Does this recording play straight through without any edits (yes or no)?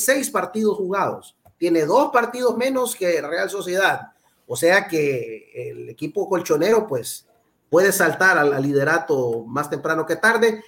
yes